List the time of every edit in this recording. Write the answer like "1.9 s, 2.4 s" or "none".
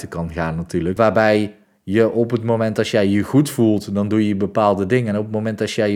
1.0 s

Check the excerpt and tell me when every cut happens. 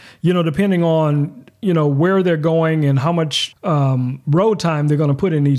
3.5 s

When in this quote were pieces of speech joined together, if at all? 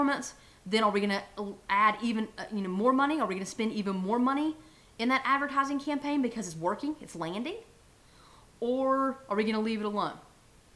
none

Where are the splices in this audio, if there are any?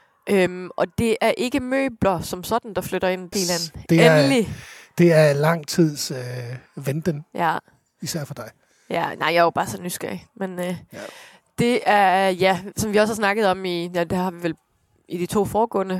3.3 s

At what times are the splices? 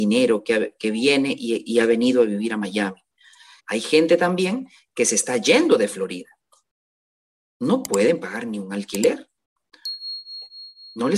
3.6 s, 7.4 s

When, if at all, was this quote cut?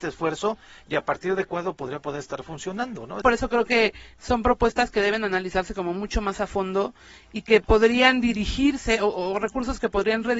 3.2 s

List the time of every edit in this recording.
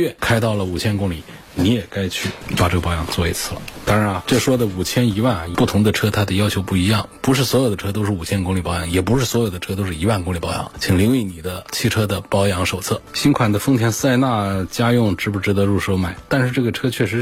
16.3 s

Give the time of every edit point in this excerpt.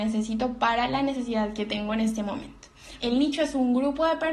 3.0 s

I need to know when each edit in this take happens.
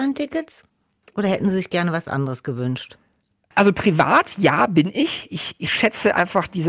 none

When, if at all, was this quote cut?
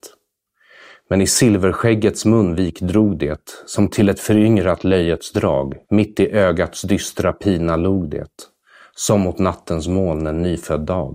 5.8 s

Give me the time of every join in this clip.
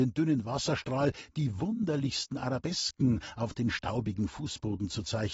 none

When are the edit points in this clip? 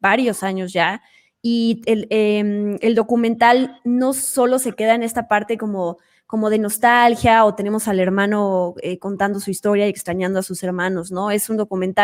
none

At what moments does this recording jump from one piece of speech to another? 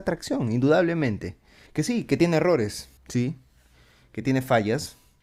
1.7 s, 3.0 s

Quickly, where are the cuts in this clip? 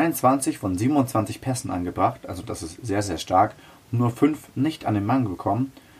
none

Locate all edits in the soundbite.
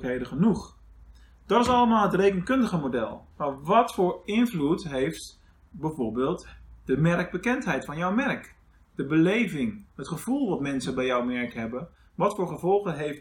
3.3 s

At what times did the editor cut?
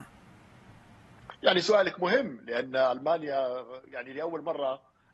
1.4 s

